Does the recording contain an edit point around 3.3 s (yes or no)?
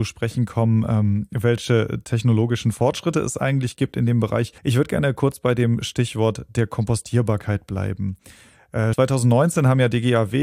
no